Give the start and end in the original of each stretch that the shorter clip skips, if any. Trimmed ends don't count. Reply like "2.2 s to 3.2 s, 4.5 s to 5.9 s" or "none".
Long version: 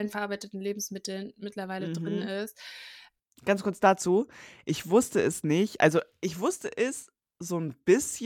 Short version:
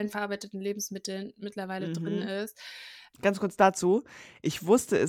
3.1 s to 3.4 s